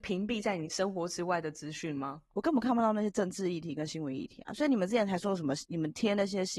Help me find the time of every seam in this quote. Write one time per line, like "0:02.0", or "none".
none